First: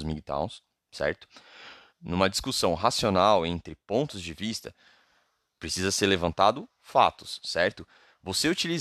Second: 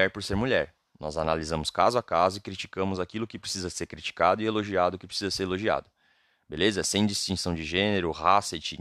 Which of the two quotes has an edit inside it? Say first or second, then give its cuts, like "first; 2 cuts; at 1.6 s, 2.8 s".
first; 1 cut; at 1.9 s